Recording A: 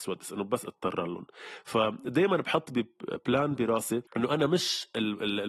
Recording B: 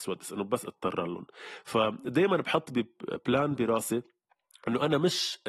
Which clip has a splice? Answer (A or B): A